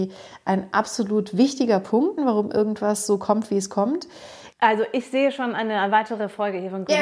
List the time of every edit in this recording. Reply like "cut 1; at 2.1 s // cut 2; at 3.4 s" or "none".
cut 1; at 2.2 s // cut 2; at 4.5 s